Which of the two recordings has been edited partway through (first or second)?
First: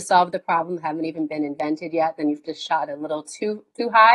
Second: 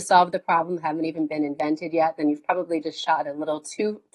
first